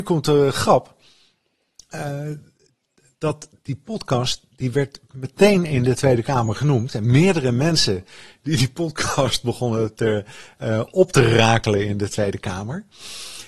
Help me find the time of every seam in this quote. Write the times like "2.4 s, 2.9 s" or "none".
6.9 s